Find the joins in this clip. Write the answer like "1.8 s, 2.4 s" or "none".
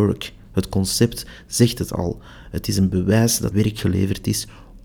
3.5 s

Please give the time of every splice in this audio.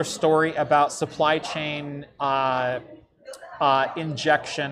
none

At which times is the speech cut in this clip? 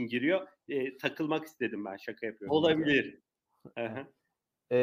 2.5 s

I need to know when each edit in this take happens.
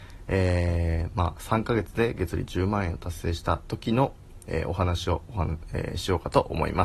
none

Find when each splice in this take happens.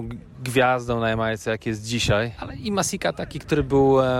2.4 s

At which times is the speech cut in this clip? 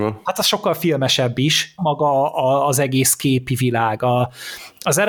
1.8 s

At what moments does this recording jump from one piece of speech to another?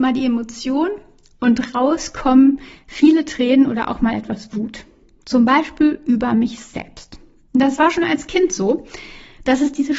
none

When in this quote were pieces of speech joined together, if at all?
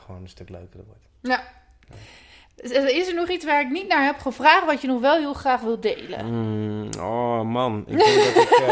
none

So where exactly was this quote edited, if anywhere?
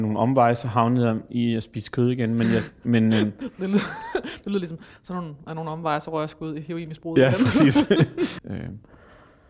8.4 s

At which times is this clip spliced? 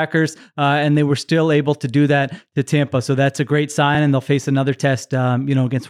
none

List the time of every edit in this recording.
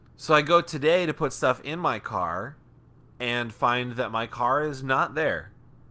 none

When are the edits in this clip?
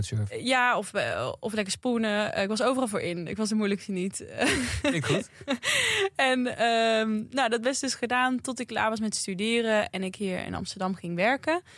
none

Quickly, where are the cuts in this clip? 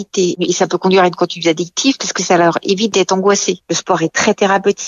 none

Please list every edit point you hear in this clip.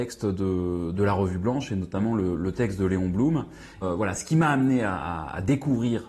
3.8 s

